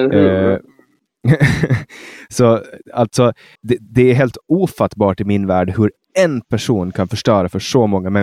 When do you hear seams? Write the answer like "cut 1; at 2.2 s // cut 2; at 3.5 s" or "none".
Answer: cut 1; at 3.6 s